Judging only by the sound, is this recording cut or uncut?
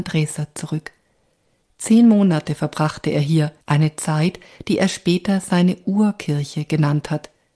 cut